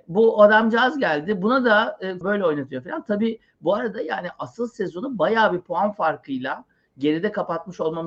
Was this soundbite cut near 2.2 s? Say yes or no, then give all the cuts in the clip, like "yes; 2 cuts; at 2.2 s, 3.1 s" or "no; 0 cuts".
yes; 1 cut; at 2.2 s